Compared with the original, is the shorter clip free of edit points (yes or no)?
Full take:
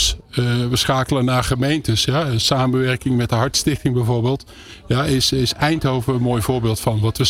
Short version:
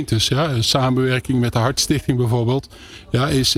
yes